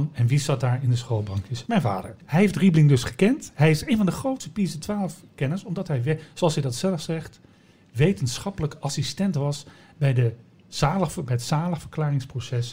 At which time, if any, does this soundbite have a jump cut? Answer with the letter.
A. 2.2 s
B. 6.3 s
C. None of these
A